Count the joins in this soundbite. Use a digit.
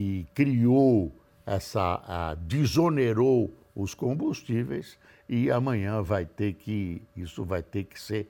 0